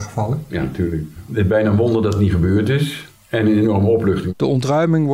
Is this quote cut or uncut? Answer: uncut